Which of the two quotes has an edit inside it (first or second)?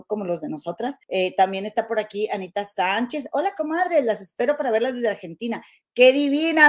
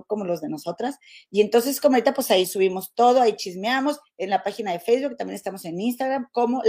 first